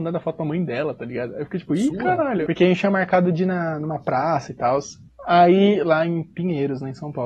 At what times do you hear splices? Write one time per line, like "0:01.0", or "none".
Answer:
0:02.5